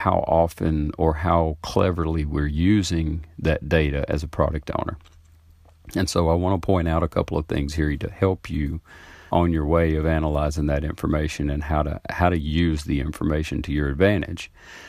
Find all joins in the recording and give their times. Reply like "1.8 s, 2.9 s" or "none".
9.3 s